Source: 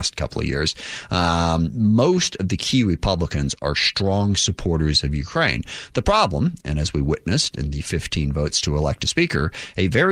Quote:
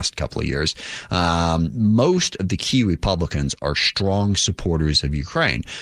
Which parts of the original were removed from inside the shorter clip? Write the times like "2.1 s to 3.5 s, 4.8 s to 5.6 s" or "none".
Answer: none